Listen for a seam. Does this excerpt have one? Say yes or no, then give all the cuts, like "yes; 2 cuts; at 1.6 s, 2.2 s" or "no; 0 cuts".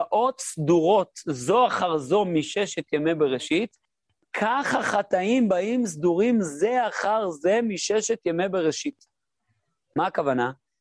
no; 0 cuts